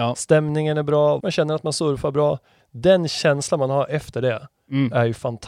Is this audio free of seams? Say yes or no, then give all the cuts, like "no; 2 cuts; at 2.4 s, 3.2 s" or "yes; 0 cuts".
no; 1 cut; at 1.2 s